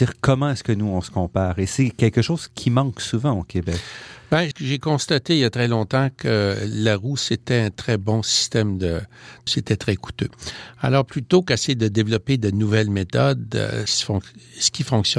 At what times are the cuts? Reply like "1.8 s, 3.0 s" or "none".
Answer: 4.5 s, 9.5 s, 13.9 s